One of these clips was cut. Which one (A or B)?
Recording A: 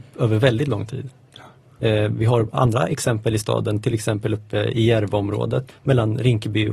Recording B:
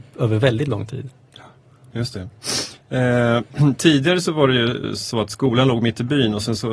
A